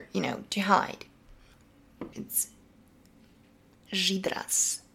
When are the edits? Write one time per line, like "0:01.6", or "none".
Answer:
0:02.1